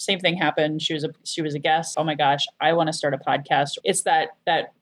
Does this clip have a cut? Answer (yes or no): yes